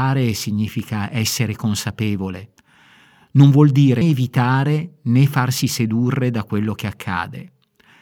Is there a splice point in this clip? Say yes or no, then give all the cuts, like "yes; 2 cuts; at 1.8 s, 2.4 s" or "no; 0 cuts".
yes; 1 cut; at 4.0 s